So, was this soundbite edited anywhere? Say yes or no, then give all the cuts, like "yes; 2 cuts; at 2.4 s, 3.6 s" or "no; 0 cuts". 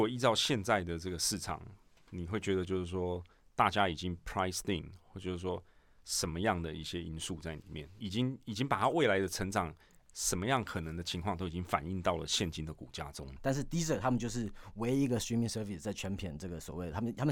yes; 2 cuts; at 8.0 s, 13.4 s